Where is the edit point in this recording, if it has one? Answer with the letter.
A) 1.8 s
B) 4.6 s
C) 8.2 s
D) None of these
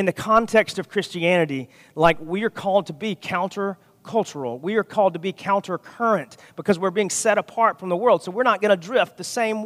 D